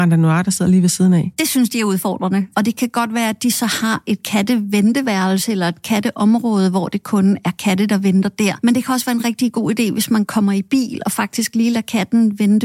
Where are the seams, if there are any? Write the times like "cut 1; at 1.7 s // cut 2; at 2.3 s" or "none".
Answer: cut 1; at 2.5 s